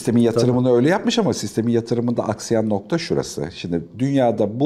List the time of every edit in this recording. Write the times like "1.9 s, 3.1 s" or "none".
none